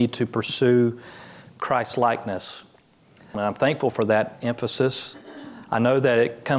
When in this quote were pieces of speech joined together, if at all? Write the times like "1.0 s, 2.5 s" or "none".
3.3 s